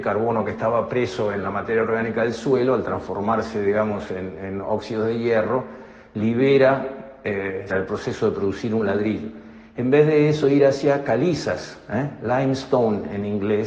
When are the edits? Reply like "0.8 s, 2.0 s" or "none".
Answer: 7.7 s